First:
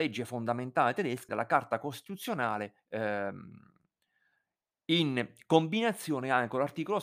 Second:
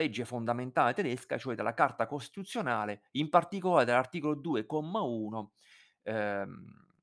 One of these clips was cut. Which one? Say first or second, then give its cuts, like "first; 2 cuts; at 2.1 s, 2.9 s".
first; 2 cuts; at 1.3 s, 2.8 s